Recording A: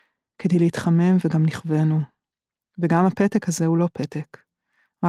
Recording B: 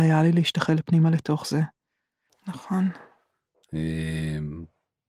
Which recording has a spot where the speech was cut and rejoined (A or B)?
B